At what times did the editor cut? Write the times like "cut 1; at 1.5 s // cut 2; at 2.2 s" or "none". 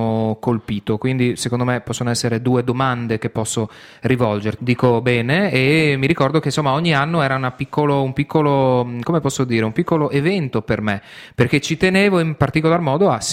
cut 1; at 4.6 s